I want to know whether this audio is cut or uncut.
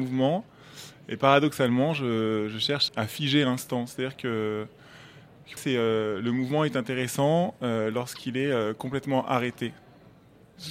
cut